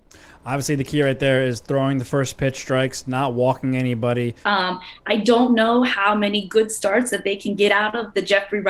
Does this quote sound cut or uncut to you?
cut